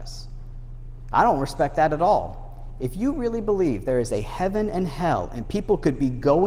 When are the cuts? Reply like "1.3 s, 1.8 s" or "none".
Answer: none